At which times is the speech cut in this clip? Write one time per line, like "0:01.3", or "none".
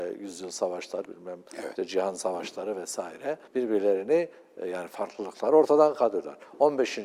0:01.0
0:03.5